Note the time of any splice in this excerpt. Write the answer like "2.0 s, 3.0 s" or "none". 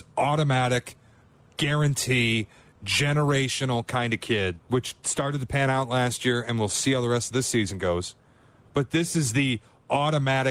4.6 s